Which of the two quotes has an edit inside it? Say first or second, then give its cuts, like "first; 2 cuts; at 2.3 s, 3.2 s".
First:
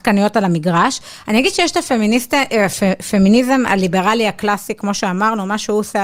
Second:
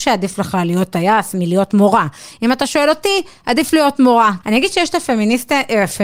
second; 1 cut; at 4.4 s